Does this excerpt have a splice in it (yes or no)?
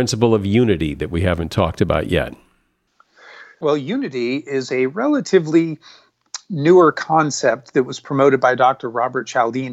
no